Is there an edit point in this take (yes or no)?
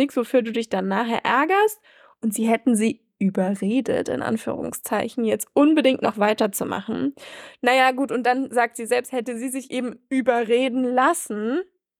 no